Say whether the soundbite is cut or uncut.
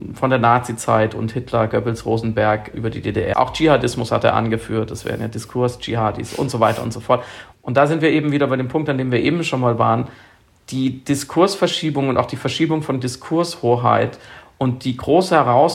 cut